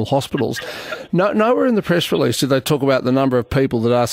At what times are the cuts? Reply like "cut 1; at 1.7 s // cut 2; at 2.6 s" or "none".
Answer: none